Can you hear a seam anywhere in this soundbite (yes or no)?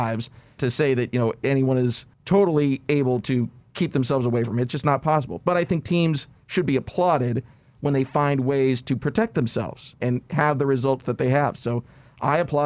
no